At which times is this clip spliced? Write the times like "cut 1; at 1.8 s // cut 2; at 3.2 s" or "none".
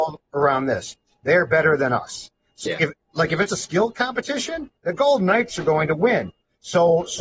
cut 1; at 2.7 s // cut 2; at 4.8 s

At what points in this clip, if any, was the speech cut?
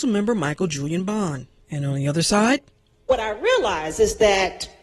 cut 1; at 1.6 s

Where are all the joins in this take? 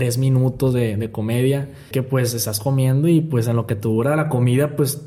cut 1; at 1.9 s

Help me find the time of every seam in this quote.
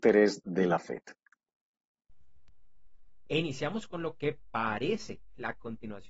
cut 1; at 3.3 s

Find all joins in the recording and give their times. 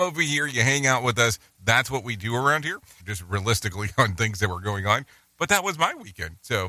cut 1; at 3.0 s

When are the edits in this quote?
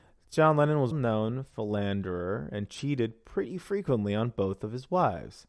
cut 1; at 0.9 s

